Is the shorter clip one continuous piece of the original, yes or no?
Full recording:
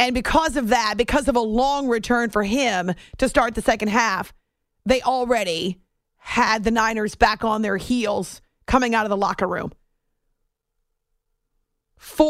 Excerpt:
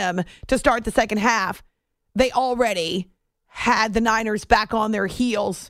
yes